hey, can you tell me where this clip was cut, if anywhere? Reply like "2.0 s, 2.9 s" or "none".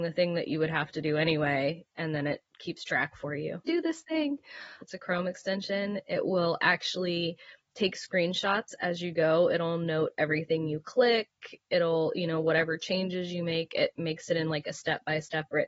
3.7 s, 4.8 s